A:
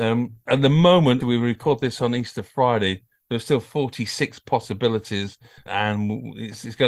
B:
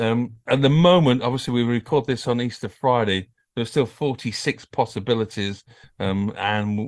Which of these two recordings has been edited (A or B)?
A